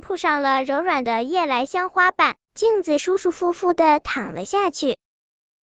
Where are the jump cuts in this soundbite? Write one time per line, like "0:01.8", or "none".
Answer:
none